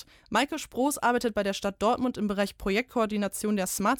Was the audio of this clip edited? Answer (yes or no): no